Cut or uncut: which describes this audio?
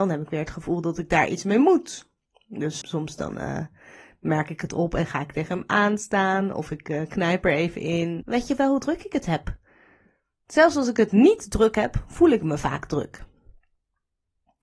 cut